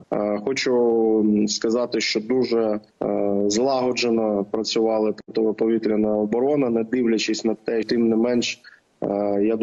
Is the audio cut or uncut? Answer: cut